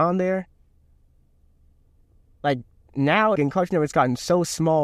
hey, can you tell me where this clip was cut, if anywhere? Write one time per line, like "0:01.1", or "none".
0:03.4

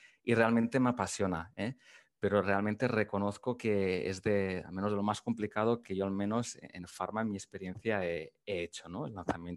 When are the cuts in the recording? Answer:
none

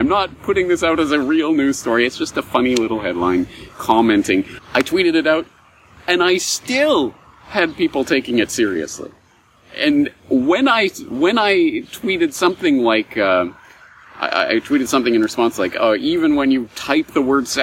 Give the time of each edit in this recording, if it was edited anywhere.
0:04.6

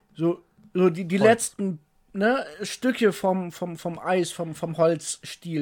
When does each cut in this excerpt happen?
none

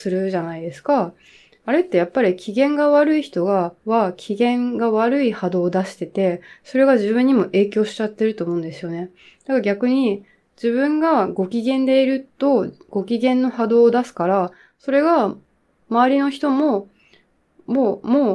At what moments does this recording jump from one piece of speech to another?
none

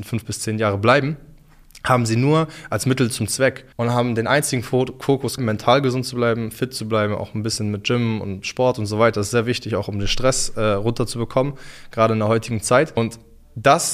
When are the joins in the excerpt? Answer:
0:05.4

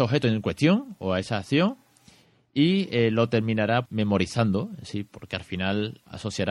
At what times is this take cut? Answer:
0:03.8

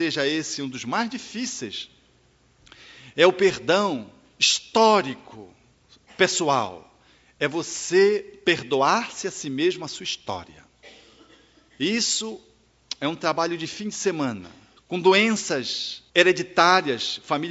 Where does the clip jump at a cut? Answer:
0:14.8
0:16.1

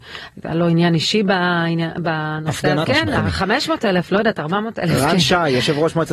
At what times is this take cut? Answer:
0:02.8

